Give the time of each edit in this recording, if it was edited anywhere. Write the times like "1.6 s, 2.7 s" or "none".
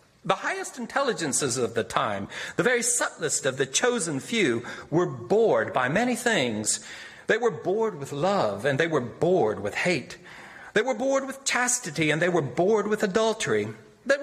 7.3 s